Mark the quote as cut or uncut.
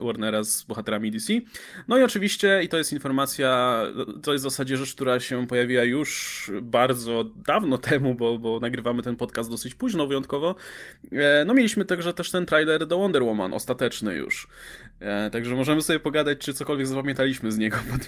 uncut